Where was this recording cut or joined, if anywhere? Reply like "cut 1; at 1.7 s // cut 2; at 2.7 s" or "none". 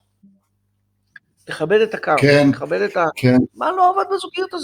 cut 1; at 3.5 s